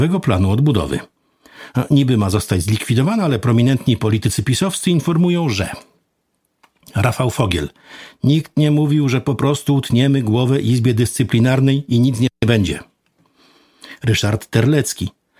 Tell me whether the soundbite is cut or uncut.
uncut